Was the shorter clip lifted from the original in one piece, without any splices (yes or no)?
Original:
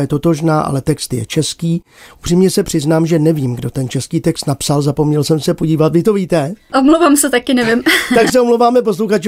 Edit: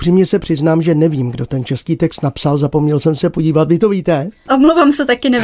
yes